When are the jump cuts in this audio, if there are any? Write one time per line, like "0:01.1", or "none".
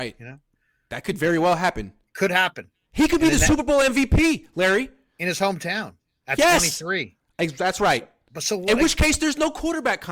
none